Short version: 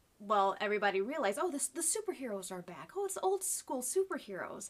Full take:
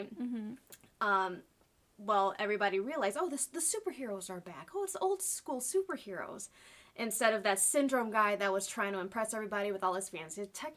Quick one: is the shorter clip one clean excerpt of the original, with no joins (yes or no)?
yes